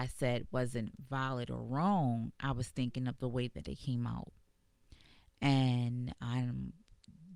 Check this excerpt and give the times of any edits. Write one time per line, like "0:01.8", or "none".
none